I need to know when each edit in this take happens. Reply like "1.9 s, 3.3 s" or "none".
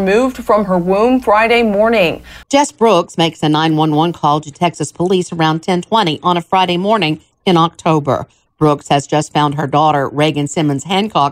2.4 s